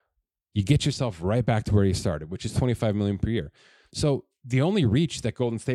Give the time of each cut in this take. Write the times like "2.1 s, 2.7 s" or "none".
none